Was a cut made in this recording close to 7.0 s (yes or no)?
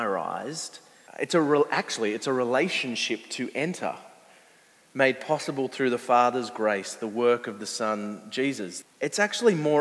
no